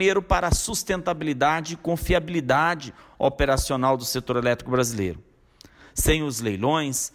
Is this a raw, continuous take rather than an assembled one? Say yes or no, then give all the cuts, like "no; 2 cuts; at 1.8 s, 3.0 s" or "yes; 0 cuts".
yes; 0 cuts